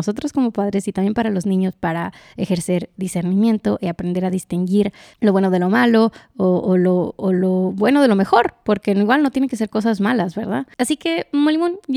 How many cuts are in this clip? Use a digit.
1